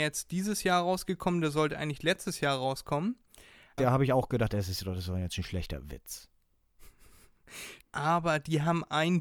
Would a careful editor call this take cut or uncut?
cut